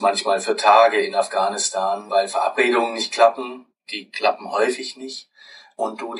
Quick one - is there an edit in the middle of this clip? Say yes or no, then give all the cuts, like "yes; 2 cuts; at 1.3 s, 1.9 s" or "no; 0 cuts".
no; 0 cuts